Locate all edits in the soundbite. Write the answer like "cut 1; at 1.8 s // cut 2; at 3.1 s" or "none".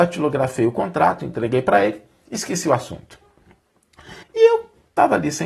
cut 1; at 4.2 s